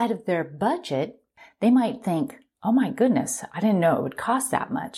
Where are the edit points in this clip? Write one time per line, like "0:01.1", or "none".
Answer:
none